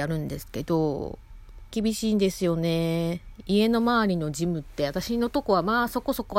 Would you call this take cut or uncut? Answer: cut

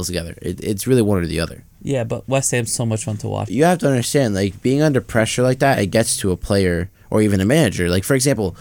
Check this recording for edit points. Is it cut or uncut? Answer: cut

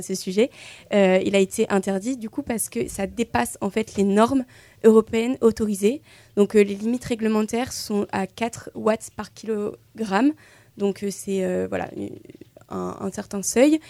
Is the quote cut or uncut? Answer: uncut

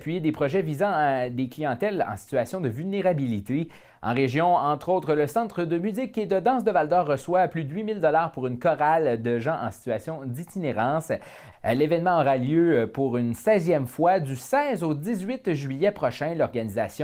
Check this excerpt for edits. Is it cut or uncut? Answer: cut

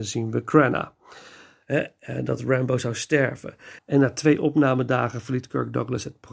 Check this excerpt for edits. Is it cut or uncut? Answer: cut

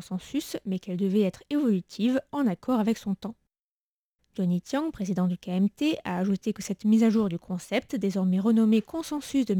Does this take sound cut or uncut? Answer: cut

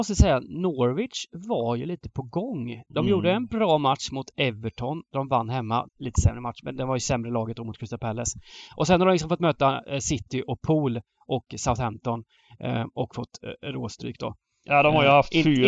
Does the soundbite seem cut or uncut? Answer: cut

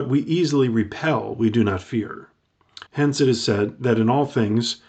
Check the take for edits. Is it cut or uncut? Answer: cut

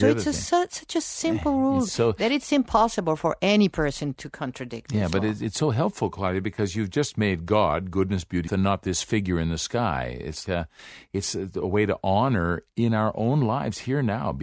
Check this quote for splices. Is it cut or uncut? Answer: cut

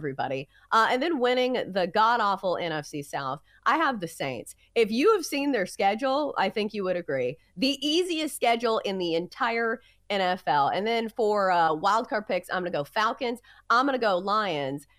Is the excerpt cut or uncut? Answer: uncut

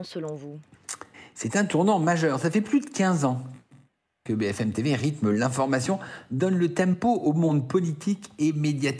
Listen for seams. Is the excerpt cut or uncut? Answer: uncut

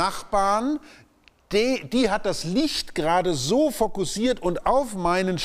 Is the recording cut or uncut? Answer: uncut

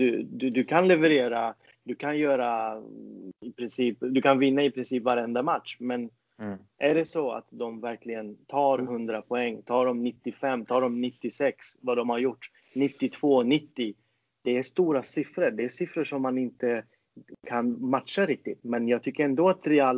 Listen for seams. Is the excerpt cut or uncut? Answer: uncut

